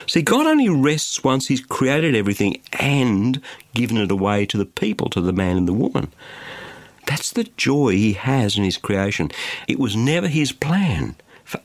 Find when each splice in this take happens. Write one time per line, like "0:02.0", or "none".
0:07.0
0:09.7